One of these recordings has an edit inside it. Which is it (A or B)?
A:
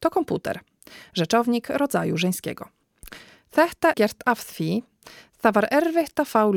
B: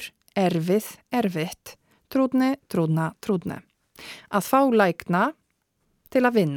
A